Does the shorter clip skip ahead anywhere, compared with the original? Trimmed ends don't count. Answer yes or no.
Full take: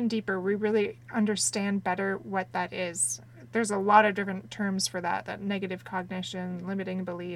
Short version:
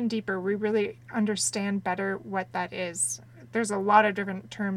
no